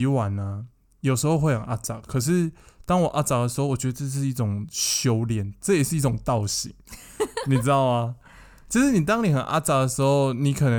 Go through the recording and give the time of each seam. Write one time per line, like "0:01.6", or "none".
none